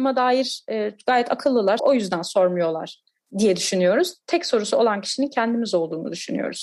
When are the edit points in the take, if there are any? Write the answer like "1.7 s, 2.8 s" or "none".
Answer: 1.8 s